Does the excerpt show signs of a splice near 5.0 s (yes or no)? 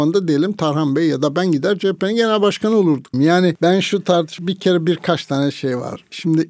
no